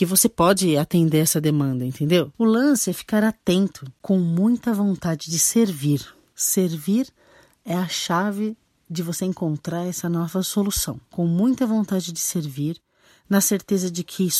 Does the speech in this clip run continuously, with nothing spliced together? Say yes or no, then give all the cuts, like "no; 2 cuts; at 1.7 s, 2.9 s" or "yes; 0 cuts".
yes; 0 cuts